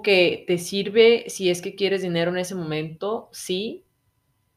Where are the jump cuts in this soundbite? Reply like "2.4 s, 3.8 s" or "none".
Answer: none